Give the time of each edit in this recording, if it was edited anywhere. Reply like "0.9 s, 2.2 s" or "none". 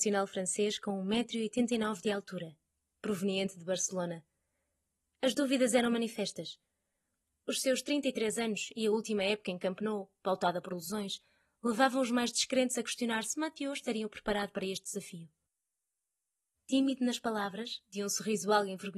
none